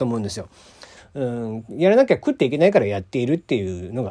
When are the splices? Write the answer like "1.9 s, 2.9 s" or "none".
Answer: 1.0 s